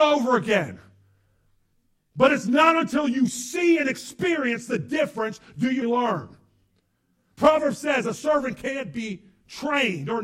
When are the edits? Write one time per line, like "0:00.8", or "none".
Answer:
0:05.8